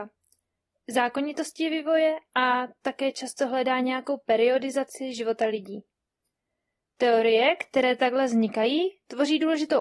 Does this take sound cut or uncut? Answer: uncut